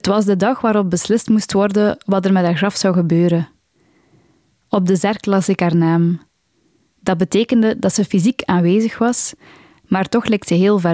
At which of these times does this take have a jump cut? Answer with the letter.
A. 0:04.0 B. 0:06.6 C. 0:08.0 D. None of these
D